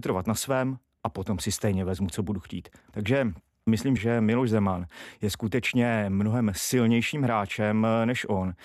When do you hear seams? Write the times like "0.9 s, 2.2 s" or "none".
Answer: 2.9 s, 4.0 s